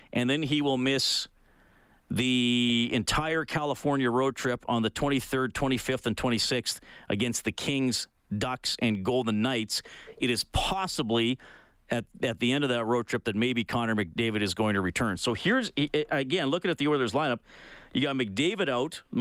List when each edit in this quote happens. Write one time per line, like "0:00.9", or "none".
none